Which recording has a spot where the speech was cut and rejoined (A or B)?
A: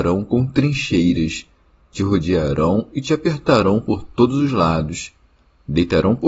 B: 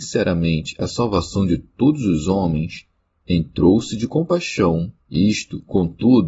B